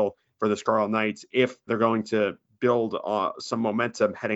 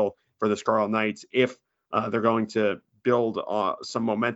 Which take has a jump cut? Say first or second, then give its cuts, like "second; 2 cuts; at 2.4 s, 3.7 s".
first; 1 cut; at 1.7 s